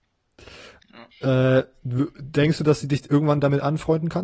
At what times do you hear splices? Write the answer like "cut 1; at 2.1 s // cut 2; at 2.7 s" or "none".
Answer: cut 1; at 1.1 s